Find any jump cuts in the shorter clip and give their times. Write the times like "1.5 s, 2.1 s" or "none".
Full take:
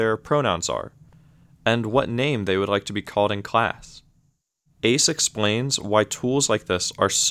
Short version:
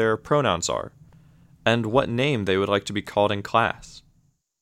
none

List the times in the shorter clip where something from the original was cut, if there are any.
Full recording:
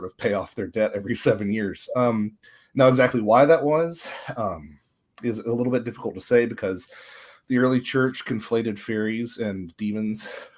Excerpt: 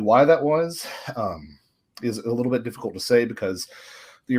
none

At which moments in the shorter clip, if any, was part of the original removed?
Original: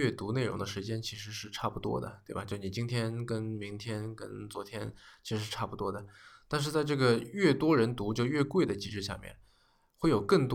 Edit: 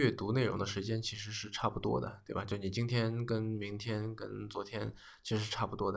none

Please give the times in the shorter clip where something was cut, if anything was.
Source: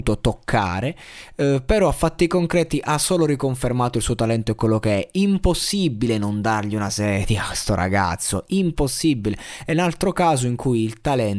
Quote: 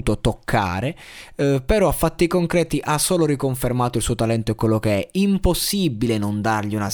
none

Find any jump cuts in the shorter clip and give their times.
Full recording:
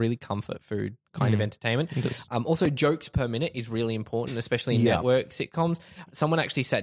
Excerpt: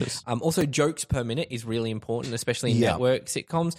none

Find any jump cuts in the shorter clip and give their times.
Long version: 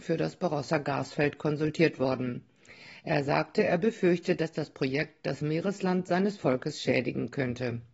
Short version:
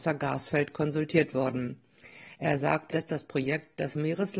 2.9 s

